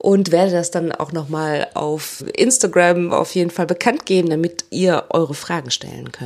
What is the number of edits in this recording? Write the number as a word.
one